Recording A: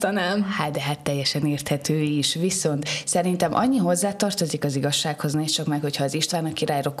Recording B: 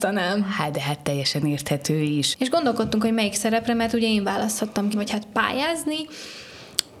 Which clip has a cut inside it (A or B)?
B